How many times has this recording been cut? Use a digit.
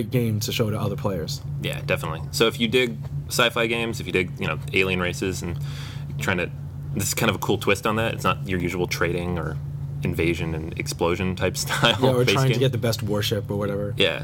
1